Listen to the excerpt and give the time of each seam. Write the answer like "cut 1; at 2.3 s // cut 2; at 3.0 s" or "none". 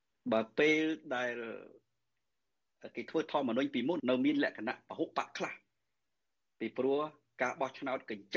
cut 1; at 4.0 s